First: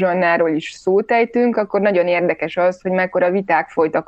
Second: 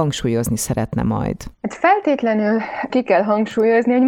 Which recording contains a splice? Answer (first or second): second